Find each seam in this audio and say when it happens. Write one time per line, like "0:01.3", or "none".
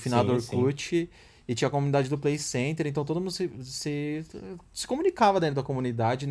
none